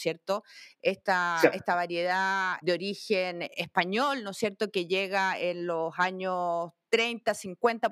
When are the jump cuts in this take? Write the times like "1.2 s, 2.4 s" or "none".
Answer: 2.6 s